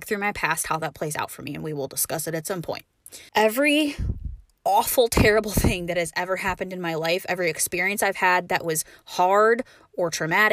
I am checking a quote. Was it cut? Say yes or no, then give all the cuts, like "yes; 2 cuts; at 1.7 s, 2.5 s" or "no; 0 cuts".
yes; 1 cut; at 3.3 s